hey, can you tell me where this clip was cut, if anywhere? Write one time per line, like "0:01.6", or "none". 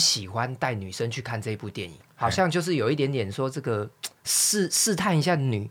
0:02.1